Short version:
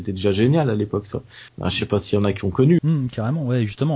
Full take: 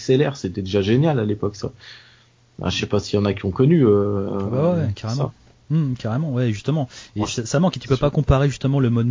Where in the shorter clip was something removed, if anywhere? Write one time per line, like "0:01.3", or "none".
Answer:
0:01.5
0:02.8